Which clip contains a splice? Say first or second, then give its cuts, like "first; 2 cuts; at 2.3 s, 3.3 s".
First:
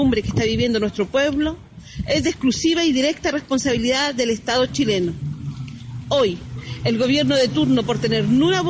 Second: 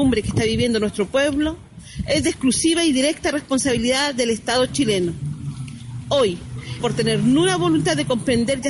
second; 1 cut; at 6.8 s